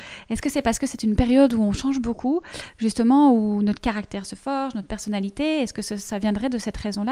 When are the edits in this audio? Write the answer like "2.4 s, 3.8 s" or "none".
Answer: none